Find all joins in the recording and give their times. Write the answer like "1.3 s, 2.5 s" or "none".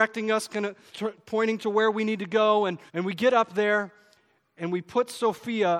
0.9 s, 2.9 s